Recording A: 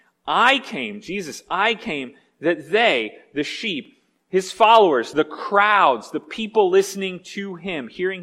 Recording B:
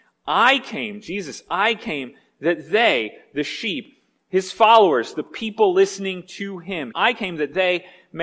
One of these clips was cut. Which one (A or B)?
B